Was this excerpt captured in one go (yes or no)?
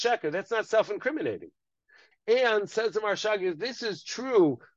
no